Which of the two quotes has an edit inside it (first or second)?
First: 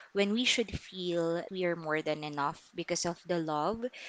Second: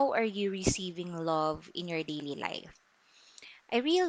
first